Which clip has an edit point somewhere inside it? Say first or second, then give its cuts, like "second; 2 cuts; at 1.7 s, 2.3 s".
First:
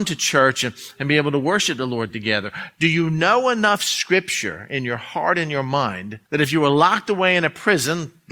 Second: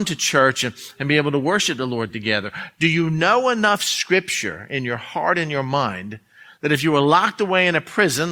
first; 1 cut; at 6.3 s